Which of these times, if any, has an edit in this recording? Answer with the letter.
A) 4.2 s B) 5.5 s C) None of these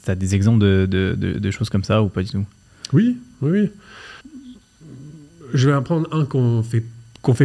A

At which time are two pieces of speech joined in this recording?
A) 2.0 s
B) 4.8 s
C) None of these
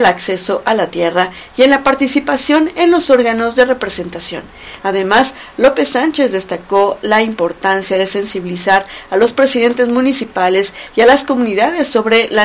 B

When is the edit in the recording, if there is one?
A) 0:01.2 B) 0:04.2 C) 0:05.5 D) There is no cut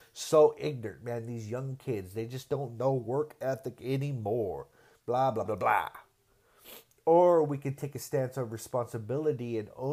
C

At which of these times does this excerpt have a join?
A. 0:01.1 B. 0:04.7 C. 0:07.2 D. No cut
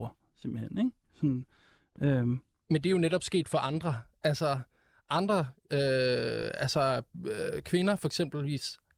D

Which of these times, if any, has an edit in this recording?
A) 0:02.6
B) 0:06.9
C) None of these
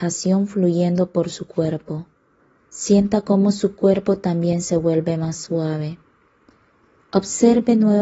A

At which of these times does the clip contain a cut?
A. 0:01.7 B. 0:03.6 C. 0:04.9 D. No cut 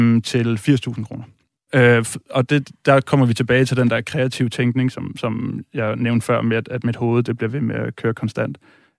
A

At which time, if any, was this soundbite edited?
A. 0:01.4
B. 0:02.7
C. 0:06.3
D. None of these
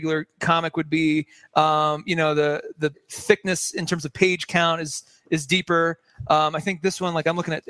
B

